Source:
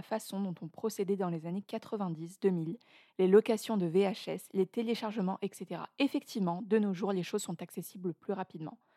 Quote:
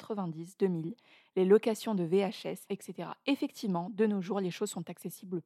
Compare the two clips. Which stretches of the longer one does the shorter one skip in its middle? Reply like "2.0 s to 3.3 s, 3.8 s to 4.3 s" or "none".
4.5 s to 5.4 s